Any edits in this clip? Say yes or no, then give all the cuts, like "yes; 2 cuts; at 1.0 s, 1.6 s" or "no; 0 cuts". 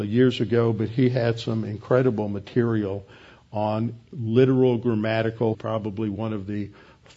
yes; 1 cut; at 5.5 s